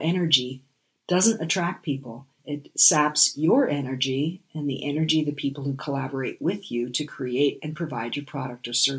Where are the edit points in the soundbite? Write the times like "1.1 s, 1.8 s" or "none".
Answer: 2.4 s